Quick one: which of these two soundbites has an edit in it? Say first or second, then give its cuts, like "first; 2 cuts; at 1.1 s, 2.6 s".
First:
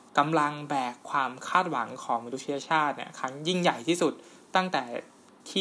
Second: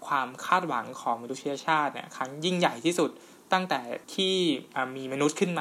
second; 1 cut; at 4.0 s